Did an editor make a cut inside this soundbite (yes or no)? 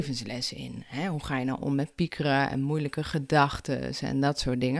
no